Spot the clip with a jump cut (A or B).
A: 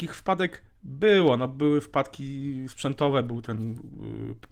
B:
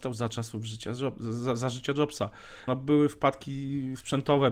B